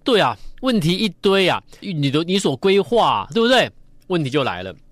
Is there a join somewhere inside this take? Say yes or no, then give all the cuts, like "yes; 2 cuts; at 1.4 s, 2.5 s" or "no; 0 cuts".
yes; 1 cut; at 1.8 s